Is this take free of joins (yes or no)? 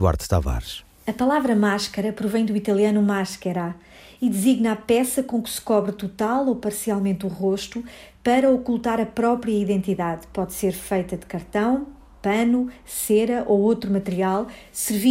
yes